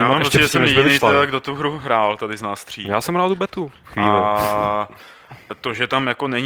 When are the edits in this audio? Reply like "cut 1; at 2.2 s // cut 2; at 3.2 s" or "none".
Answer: none